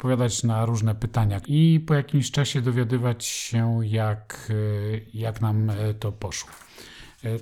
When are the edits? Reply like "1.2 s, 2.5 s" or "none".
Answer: 1.4 s